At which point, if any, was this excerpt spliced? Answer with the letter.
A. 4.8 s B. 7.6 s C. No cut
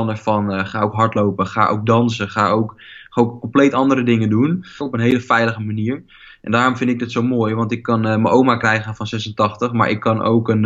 A